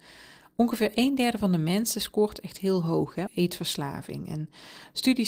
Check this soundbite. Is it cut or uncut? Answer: cut